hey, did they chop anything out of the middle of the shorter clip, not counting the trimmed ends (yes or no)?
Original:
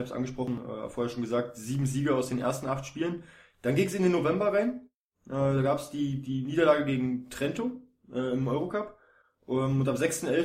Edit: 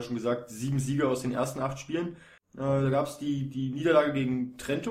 yes